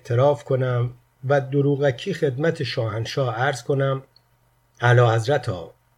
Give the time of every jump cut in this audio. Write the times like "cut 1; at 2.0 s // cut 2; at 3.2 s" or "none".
none